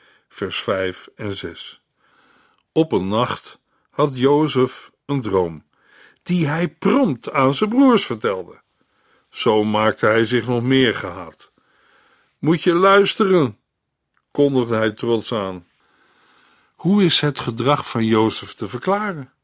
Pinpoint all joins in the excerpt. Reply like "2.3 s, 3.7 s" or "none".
none